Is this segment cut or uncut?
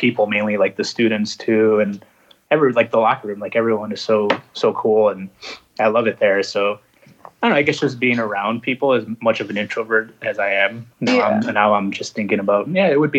cut